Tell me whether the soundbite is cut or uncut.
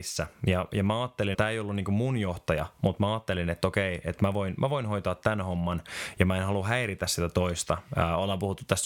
cut